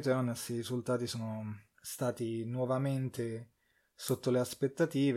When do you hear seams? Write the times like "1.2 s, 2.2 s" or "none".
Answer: none